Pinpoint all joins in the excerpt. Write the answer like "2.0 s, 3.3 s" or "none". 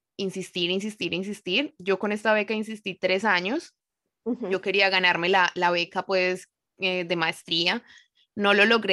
none